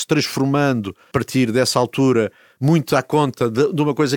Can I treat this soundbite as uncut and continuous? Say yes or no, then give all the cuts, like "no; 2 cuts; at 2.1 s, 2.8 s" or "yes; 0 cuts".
yes; 0 cuts